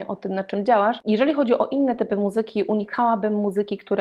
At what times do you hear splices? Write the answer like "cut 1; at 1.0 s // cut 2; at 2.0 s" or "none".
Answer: cut 1; at 1.0 s